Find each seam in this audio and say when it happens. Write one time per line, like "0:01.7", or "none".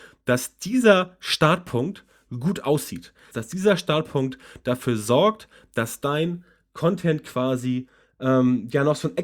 0:03.3